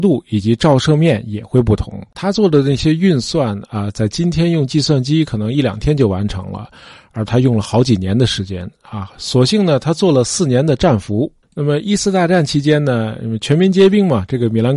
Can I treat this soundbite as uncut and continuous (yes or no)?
no